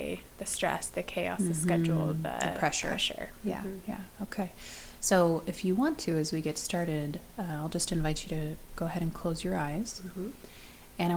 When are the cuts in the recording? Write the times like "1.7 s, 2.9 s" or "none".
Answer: none